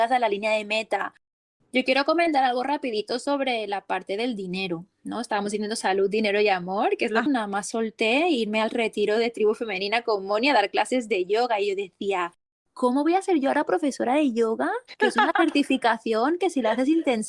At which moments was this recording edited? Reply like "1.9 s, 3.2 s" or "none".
1.6 s, 7.3 s